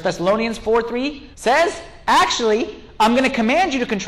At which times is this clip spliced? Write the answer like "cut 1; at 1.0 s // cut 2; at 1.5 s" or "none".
cut 1; at 1.3 s